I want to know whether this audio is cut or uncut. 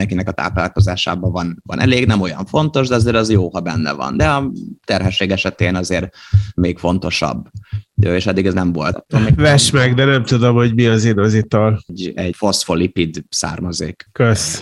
cut